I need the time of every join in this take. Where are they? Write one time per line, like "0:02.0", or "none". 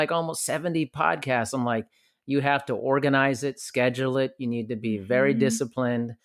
none